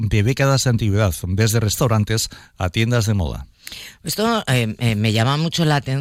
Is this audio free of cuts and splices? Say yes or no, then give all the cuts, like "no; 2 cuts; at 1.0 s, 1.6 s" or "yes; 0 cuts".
yes; 0 cuts